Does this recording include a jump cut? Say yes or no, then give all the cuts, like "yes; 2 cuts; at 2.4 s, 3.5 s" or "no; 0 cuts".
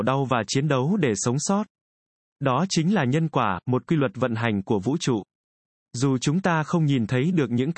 no; 0 cuts